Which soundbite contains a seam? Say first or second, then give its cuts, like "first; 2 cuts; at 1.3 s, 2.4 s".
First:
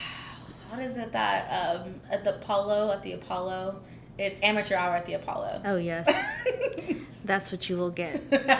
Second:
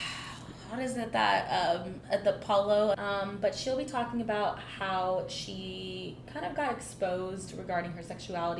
second; 1 cut; at 2.9 s